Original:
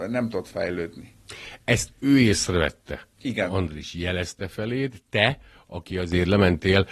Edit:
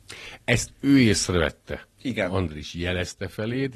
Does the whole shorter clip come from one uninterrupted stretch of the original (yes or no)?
yes